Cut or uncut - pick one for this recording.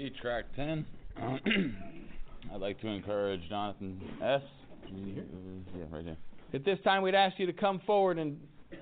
cut